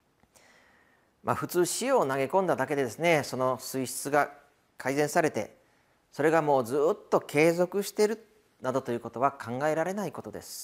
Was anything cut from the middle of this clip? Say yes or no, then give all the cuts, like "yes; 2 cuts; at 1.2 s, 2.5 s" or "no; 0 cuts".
no; 0 cuts